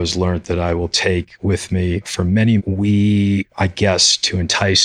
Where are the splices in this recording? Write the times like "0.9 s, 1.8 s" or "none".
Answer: 2.6 s